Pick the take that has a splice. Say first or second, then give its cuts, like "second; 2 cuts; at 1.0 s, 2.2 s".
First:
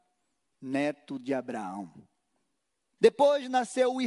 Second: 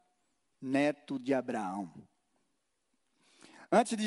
first; 1 cut; at 3.0 s